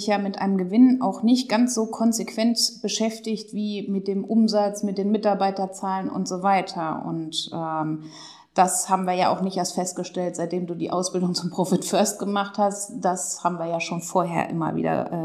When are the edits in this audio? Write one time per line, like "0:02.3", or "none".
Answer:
none